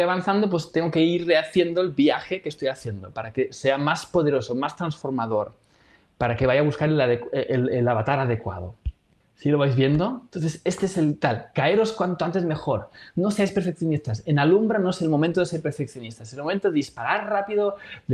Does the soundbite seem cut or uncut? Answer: uncut